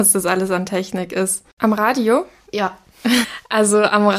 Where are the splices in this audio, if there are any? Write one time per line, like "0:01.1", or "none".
0:01.6
0:03.2